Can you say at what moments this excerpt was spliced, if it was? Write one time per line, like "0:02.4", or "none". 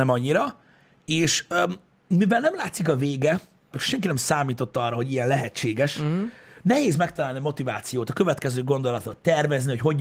0:03.7